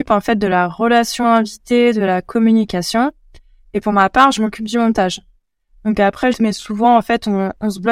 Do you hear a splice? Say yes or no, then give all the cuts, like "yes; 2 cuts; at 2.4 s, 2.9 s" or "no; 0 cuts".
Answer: yes; 1 cut; at 6.3 s